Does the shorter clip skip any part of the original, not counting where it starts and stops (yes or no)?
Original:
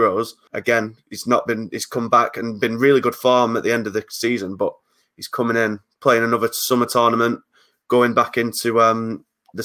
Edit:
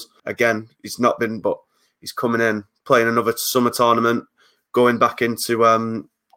yes